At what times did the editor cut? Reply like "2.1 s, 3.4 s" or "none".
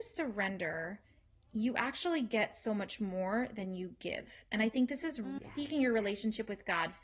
5.4 s